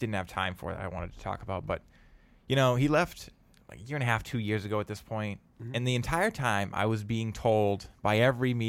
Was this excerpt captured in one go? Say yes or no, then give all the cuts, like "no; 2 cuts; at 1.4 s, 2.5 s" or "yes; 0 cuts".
yes; 0 cuts